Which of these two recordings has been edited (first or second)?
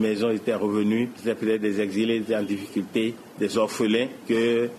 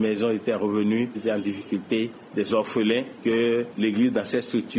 second